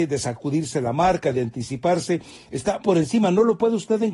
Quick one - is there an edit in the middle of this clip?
yes; 1 cut; at 2.8 s

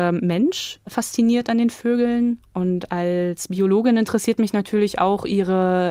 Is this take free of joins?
yes; 0 cuts

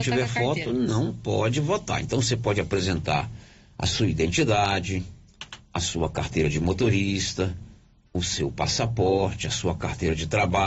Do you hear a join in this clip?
no; 0 cuts

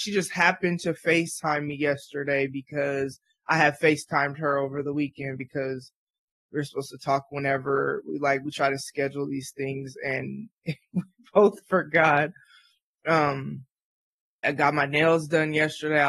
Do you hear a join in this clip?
yes; 1 cut; at 14.4 s

